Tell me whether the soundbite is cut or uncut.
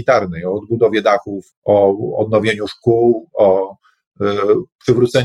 cut